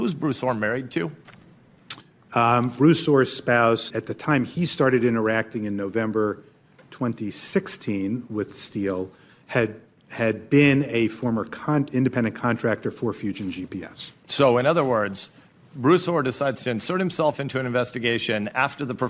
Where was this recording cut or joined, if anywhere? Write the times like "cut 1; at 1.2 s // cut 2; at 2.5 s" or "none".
cut 1; at 3.9 s